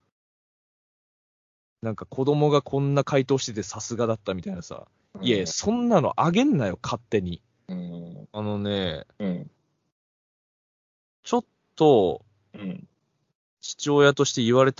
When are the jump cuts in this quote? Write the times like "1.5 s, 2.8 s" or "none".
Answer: 8.3 s